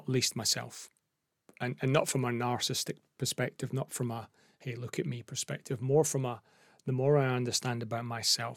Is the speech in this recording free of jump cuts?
yes; 0 cuts

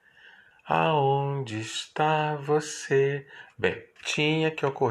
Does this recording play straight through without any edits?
no; 1 cut; at 4.0 s

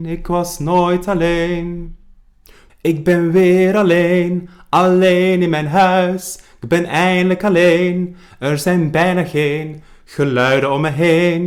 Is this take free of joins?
no; 1 cut; at 2.7 s

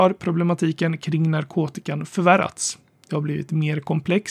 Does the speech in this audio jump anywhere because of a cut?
no; 0 cuts

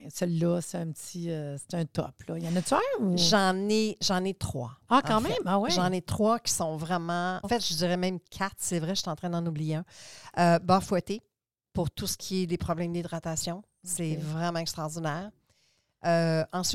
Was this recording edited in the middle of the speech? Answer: yes; 1 cut; at 7.4 s

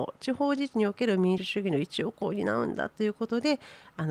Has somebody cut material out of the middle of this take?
yes; 1 cut; at 1.4 s

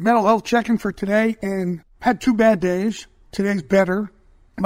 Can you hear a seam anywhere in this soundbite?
no; 0 cuts

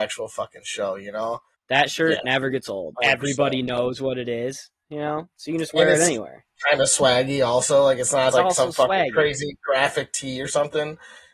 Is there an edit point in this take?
yes; 3 cuts; at 1.5 s, 3.0 s, 8.3 s

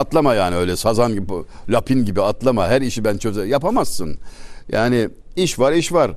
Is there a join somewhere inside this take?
no; 0 cuts

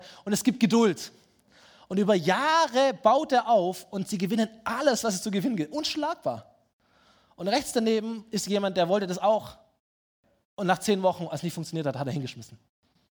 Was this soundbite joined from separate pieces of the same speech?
no; 0 cuts

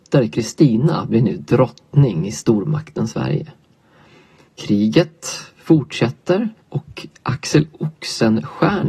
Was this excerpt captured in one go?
no; 2 cuts; at 4.5 s, 6.6 s

